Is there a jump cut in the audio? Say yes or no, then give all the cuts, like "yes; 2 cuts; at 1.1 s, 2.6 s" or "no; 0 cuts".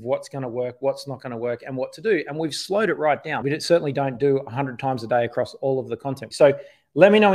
yes; 2 cuts; at 3.4 s, 6.3 s